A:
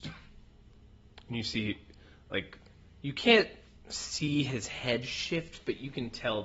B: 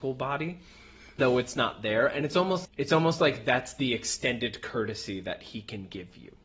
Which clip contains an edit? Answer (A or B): B